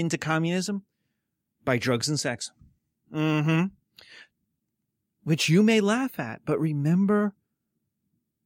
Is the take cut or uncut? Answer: uncut